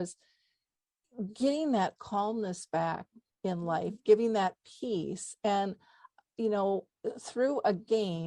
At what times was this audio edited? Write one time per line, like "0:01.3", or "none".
none